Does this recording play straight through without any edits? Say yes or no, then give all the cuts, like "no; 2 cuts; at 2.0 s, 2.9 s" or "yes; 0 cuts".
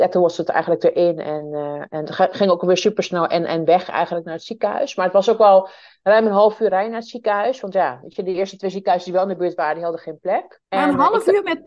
no; 1 cut; at 10.6 s